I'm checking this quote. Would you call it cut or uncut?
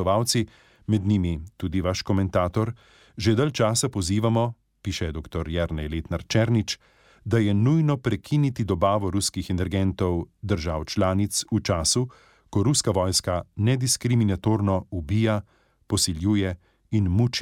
uncut